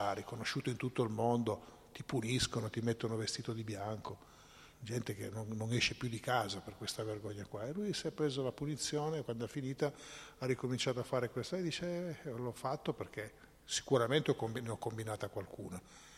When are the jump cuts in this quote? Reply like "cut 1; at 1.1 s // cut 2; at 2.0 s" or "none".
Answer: cut 1; at 4.7 s // cut 2; at 9.2 s